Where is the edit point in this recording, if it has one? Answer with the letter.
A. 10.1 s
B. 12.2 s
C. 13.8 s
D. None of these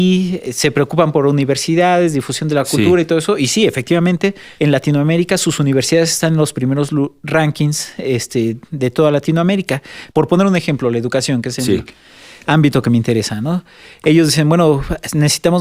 A